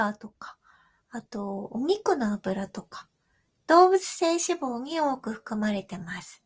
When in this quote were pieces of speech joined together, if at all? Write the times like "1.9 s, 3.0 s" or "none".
none